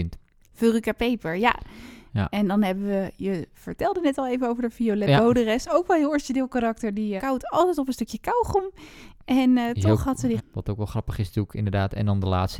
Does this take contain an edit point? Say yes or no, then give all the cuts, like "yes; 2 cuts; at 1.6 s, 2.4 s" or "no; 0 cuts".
yes; 2 cuts; at 7.2 s, 10.4 s